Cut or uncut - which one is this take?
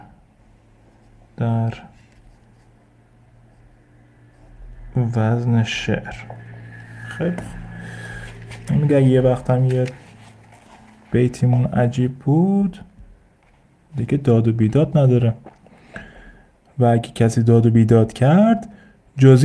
uncut